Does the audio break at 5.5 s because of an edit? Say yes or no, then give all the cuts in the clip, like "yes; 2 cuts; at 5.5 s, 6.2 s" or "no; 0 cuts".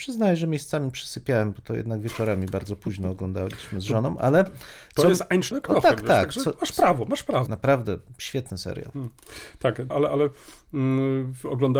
yes; 3 cuts; at 5.5 s, 7.5 s, 9.9 s